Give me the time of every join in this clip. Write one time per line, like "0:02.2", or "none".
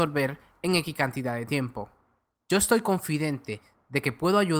0:02.4